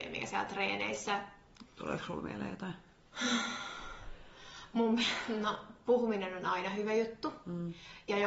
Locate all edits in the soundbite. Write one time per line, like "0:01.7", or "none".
0:01.7